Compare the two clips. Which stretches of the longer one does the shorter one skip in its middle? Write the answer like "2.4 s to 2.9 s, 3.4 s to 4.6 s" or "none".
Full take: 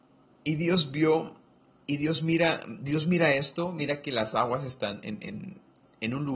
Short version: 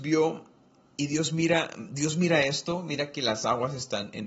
none